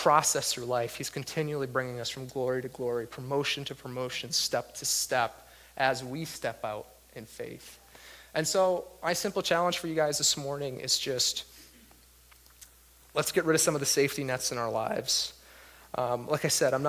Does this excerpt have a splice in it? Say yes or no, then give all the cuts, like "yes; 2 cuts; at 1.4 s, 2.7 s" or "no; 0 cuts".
no; 0 cuts